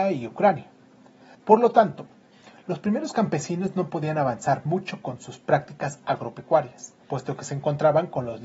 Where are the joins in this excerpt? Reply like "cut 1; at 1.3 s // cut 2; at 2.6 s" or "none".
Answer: cut 1; at 1.3 s // cut 2; at 7.0 s